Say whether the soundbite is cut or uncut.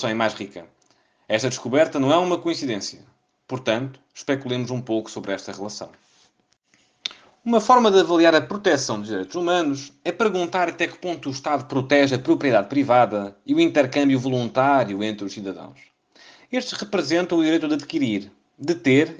uncut